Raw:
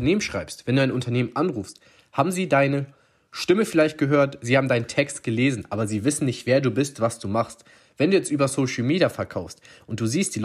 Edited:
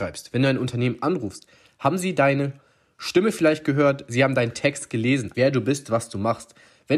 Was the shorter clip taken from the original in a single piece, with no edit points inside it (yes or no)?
no